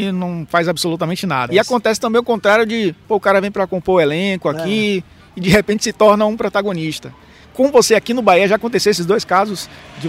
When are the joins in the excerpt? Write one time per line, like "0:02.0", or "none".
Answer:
0:01.5

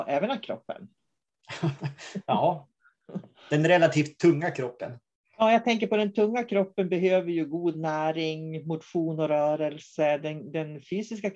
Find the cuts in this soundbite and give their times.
none

